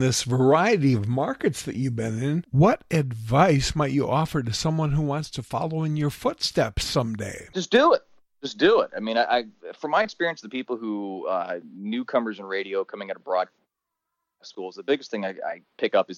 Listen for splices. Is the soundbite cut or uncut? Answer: uncut